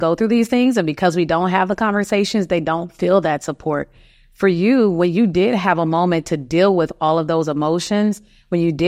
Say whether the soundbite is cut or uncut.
uncut